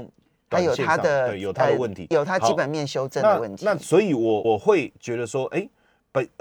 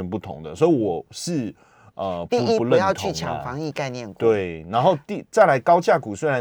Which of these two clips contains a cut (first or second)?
first